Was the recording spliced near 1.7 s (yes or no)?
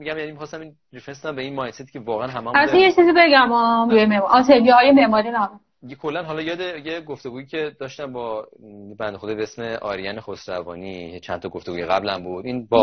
no